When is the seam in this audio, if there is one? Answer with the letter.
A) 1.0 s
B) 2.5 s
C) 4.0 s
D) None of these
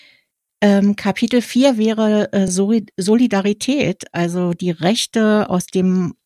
D